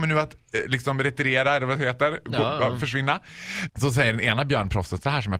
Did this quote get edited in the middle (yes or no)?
yes